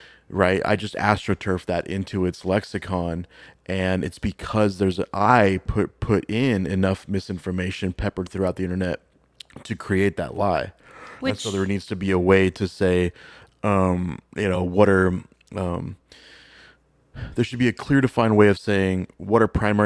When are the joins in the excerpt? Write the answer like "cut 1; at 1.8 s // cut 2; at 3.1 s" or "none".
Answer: none